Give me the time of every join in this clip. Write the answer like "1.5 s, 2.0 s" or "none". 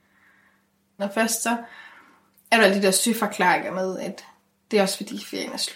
1.0 s